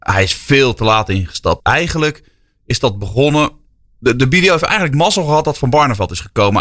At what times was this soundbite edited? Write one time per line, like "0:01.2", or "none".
0:01.6